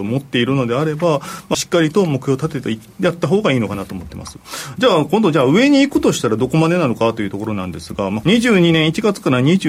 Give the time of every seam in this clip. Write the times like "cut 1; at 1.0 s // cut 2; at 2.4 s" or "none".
cut 1; at 1.5 s // cut 2; at 8.2 s